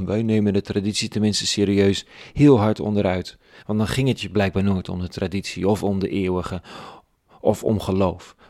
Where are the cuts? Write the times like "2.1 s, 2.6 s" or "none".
none